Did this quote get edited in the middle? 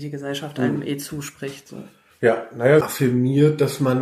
yes; 1 cut; at 2.8 s

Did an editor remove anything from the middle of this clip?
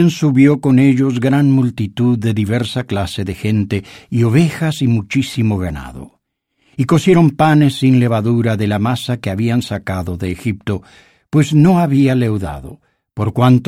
no; 0 cuts

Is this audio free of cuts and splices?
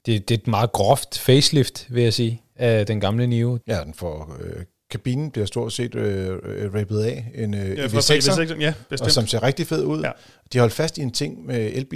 no; 1 cut; at 3.6 s

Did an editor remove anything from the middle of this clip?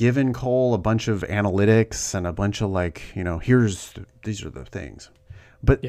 no; 0 cuts

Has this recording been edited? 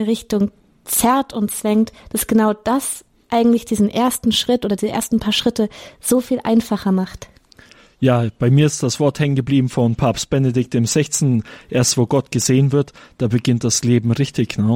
no; 0 cuts

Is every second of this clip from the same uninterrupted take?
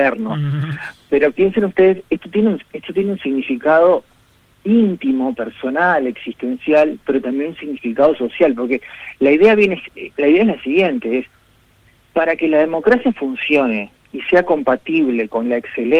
yes; 0 cuts

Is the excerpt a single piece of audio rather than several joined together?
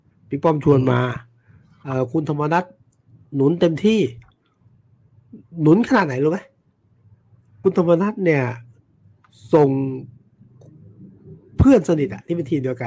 no; 1 cut; at 7.6 s

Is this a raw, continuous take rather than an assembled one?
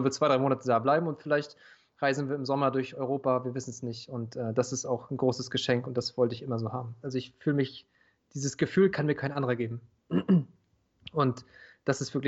no; 1 cut; at 7.0 s

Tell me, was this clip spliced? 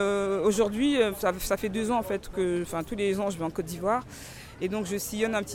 yes; 1 cut; at 1.1 s

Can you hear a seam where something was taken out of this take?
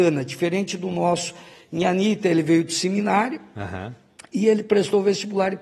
no; 0 cuts

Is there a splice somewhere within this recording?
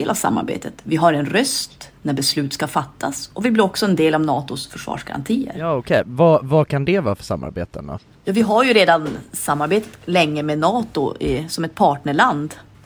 no; 0 cuts

